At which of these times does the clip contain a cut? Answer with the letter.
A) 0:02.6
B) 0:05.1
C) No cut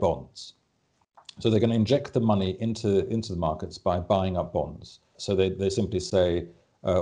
B